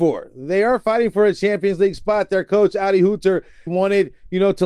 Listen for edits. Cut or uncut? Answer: cut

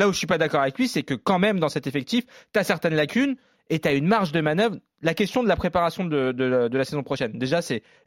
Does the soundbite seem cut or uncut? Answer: uncut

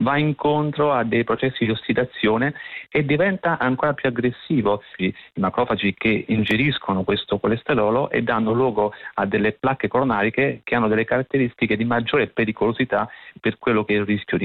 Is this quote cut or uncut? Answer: cut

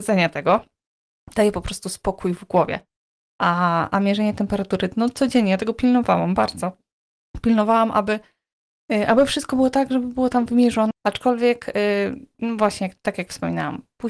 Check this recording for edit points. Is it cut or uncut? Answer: cut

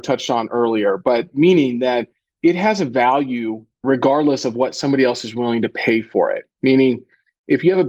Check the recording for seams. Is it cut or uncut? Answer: uncut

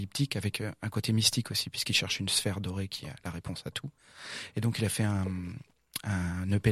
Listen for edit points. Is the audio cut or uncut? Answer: uncut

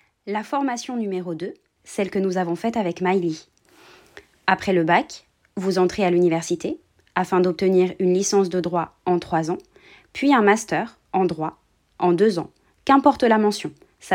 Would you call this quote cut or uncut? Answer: cut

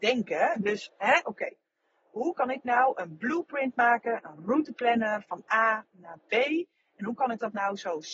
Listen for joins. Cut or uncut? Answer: cut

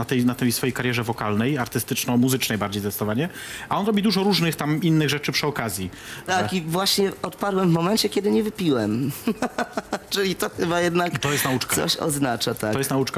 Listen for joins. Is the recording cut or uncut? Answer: cut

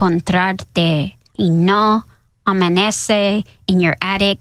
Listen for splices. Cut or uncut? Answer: cut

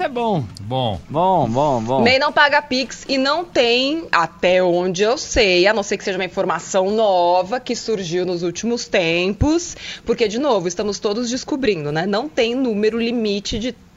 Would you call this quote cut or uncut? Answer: uncut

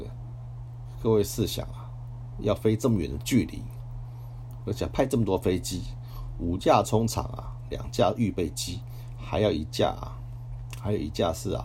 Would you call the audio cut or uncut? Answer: uncut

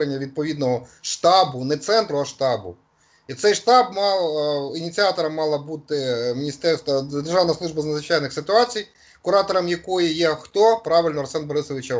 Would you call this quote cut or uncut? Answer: uncut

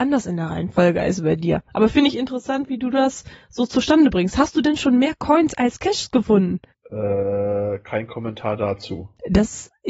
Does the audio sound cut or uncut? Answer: uncut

